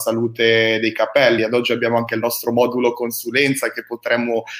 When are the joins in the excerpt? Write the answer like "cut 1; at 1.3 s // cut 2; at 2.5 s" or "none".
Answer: none